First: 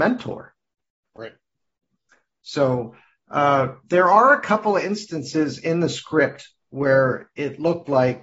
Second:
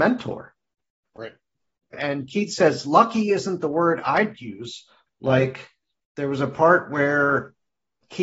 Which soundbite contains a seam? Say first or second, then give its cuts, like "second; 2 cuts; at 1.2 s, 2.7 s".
second; 2 cuts; at 1.9 s, 5.1 s